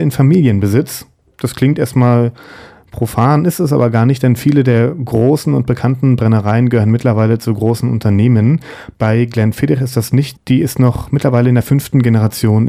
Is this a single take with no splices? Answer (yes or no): no